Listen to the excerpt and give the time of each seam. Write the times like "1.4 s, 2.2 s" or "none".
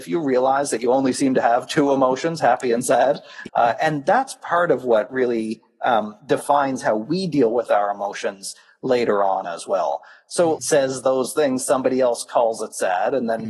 3.5 s, 10.6 s